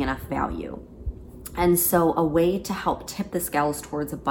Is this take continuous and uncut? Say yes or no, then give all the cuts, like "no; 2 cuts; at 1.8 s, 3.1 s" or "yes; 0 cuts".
yes; 0 cuts